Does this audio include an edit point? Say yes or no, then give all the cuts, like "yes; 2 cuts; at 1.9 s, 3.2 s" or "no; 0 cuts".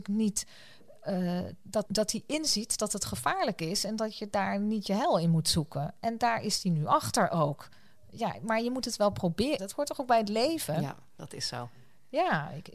yes; 2 cuts; at 1.8 s, 9.6 s